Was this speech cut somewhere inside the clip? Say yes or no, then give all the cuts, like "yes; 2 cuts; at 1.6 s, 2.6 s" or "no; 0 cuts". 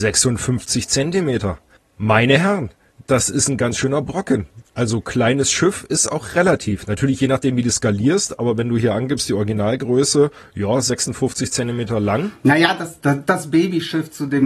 no; 0 cuts